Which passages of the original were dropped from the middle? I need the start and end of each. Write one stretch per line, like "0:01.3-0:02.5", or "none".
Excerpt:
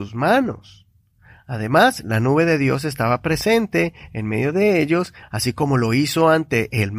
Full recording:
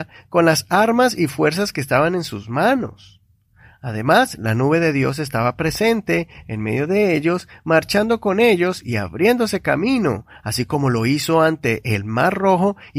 0:07.6-0:10.3